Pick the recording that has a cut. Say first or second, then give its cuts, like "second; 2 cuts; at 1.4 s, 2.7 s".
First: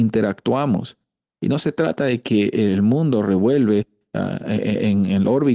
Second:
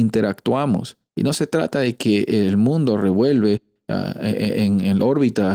second; 1 cut; at 1.1 s